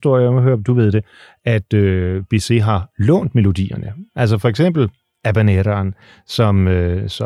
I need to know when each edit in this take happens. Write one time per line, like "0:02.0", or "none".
none